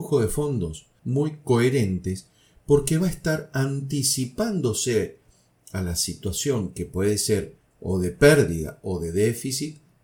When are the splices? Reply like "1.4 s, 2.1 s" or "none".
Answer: 1.0 s